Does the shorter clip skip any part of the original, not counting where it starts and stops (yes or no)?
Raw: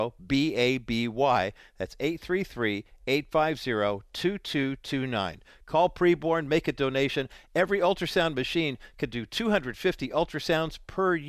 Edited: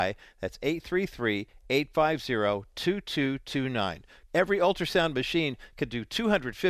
yes